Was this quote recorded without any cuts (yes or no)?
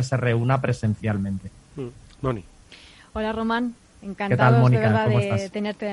yes